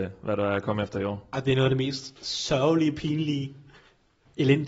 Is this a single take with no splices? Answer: yes; 0 cuts

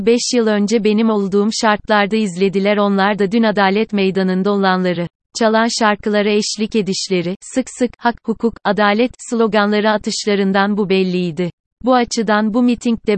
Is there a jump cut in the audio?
yes; 2 cuts; at 5.2 s, 11.7 s

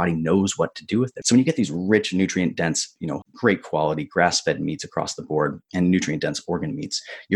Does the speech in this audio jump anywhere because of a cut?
yes; 2 cuts; at 1.2 s, 3.2 s

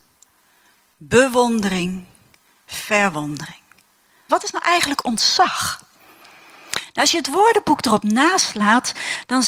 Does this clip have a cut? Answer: yes; 1 cut; at 4.3 s

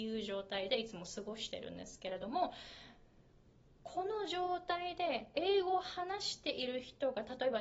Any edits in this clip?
no; 0 cuts

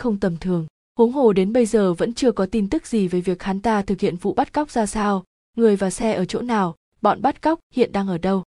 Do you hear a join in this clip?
no; 0 cuts

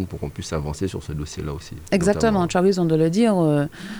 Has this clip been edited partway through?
no; 0 cuts

